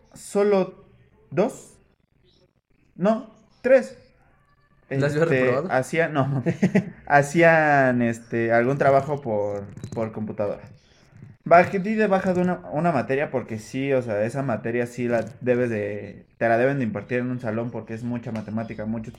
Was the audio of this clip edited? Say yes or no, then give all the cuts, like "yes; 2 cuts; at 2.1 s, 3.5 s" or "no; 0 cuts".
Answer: no; 0 cuts